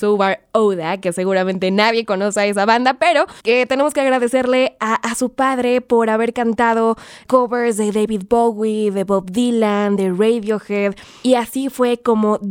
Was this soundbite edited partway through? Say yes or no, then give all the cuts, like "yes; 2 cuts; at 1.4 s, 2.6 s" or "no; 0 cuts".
yes; 1 cut; at 3.4 s